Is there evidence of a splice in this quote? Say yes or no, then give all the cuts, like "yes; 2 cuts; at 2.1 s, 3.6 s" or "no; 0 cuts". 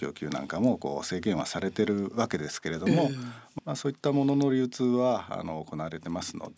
yes; 1 cut; at 3.6 s